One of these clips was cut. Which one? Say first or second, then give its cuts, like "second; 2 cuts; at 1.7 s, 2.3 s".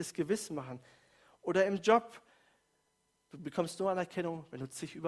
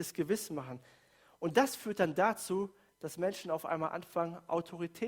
first; 1 cut; at 1.4 s